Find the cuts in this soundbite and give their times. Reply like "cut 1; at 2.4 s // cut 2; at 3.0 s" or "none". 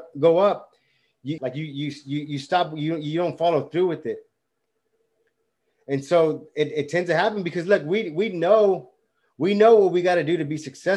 cut 1; at 1.4 s